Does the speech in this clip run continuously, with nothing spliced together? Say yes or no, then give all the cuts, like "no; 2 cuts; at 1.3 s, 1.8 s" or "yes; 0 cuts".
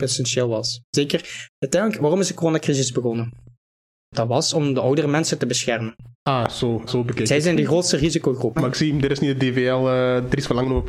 no; 2 cuts; at 6.9 s, 8.6 s